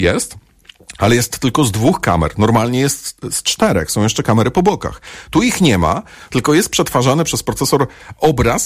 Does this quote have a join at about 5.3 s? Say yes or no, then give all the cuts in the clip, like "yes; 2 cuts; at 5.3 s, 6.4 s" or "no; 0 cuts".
no; 0 cuts